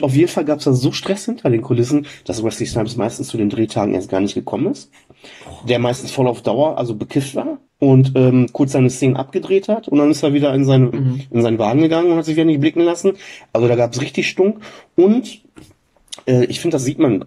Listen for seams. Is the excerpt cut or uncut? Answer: cut